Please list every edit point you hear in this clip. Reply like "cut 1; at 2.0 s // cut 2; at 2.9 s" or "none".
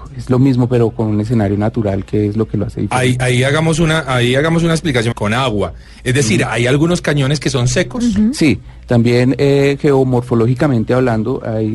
cut 1; at 5.1 s

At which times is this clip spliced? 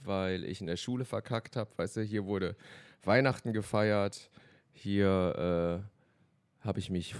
none

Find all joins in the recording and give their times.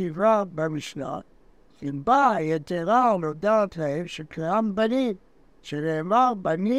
none

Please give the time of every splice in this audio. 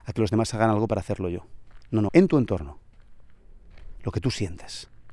cut 1; at 2.1 s

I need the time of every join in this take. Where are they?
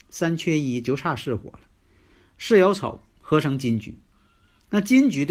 none

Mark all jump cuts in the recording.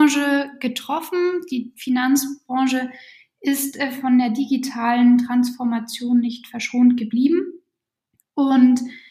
none

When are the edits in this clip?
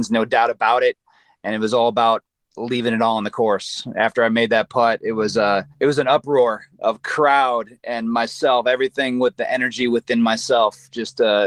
cut 1; at 5.7 s

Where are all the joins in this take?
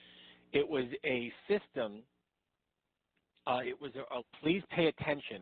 cut 1; at 4.2 s

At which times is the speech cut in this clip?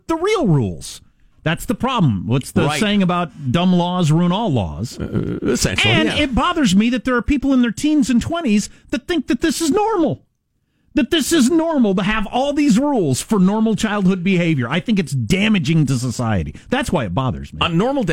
none

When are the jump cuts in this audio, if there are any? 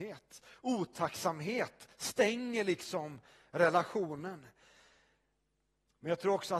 none

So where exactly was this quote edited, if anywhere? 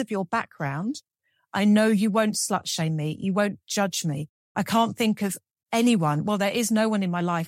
none

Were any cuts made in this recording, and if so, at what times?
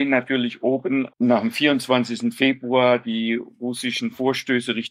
cut 1; at 1.1 s

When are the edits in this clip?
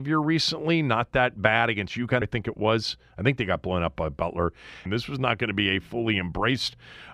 cut 1; at 2.2 s // cut 2; at 4.9 s

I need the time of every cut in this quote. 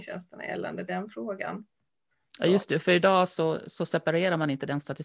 none

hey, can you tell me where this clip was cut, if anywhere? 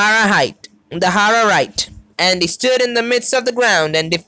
cut 1; at 2.1 s

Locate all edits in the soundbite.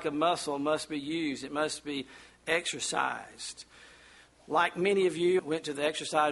cut 1; at 5.4 s

